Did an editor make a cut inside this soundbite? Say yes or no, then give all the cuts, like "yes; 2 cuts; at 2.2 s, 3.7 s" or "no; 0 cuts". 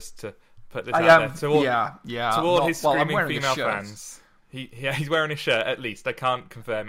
no; 0 cuts